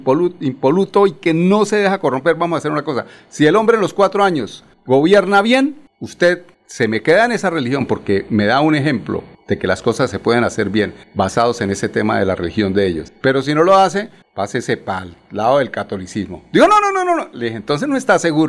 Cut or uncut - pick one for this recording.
uncut